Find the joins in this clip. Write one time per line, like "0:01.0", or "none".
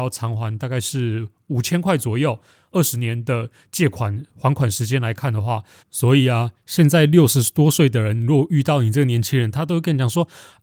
0:05.8